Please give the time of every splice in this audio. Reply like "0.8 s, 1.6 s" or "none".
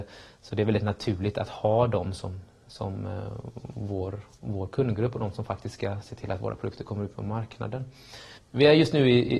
8.4 s